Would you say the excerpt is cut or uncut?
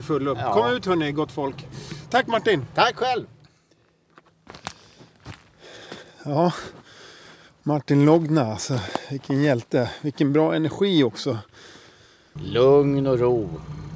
cut